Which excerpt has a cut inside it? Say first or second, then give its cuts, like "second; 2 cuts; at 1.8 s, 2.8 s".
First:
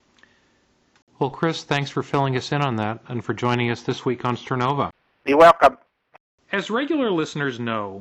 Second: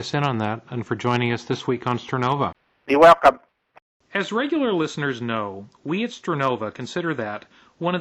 first; 1 cut; at 1.0 s